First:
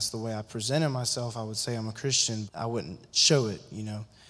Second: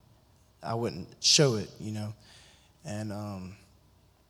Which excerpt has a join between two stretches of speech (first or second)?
first